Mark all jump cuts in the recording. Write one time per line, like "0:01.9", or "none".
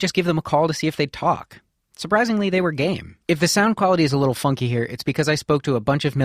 0:03.2